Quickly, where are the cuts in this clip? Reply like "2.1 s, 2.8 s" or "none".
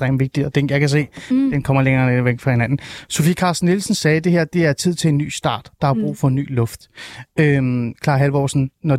none